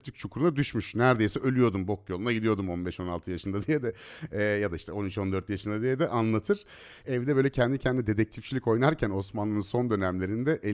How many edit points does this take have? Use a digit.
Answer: 1